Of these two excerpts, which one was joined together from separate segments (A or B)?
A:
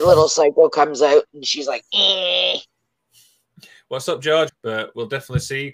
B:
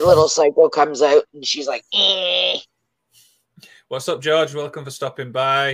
A